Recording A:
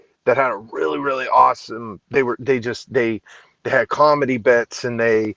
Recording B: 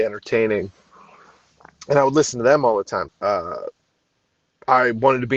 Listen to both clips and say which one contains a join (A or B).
B